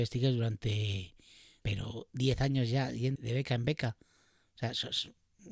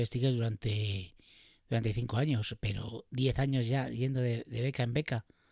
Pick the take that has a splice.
first; 2 cuts; at 1.6 s, 3.2 s

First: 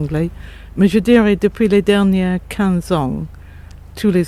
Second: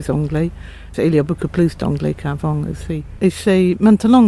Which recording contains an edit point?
second; 2 cuts; at 0.9 s, 3.2 s

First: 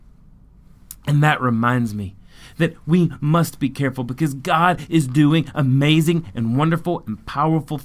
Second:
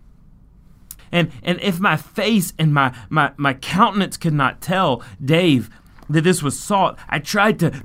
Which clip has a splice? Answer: second; 1 cut; at 1.0 s

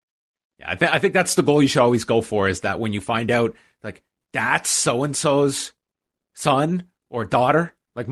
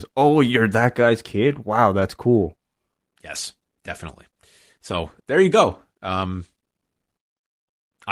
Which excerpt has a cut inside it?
second; 1 cut; at 5.2 s

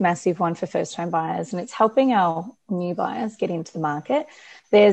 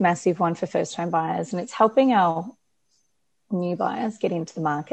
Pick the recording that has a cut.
first; 1 cut; at 2.6 s

